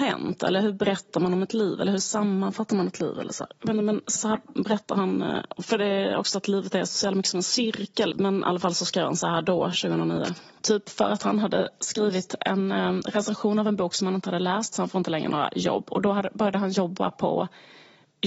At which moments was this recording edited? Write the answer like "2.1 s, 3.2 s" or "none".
4.2 s, 8.1 s, 10.6 s